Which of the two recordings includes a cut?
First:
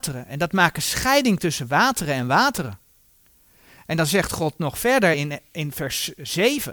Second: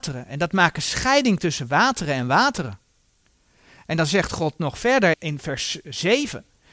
second; 1 cut; at 5.1 s

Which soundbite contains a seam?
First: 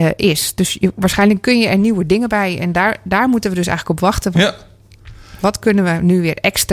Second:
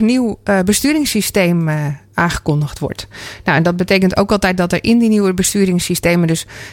first; 2 cuts; at 4.3 s, 5.4 s

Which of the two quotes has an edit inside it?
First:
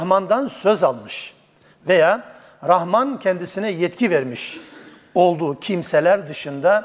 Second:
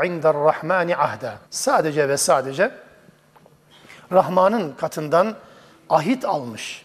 second; 1 cut; at 1.5 s

